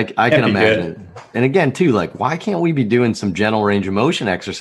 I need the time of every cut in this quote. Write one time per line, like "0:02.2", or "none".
0:01.3